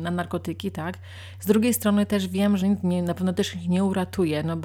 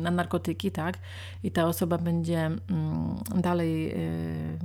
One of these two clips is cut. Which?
first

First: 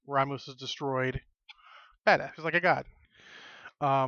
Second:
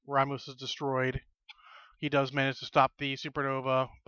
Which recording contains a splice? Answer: first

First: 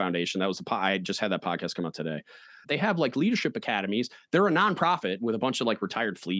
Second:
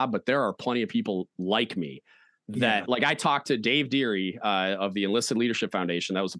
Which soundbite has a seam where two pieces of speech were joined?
first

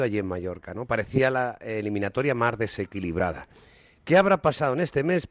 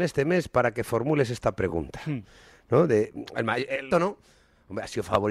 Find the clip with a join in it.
second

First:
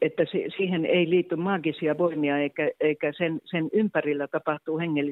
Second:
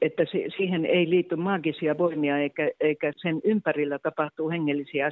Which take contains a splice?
second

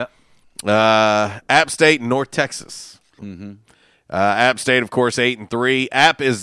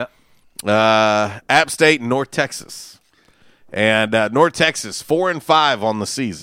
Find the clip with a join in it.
first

